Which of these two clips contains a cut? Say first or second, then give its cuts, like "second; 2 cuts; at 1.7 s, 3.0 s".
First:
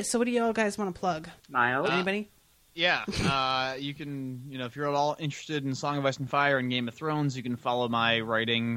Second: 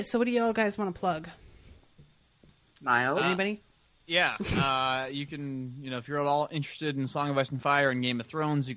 first; 1 cut; at 1.4 s